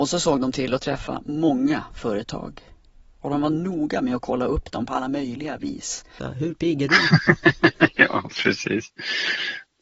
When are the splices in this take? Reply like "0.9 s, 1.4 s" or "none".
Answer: 6.2 s